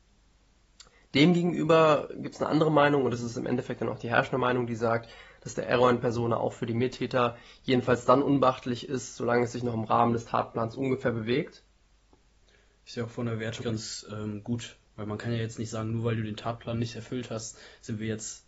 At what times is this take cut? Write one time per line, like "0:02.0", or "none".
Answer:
0:13.6

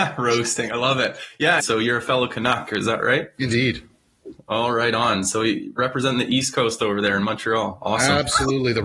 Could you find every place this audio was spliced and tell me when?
0:01.6

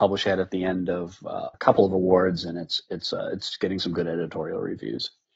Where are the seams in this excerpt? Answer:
0:01.5

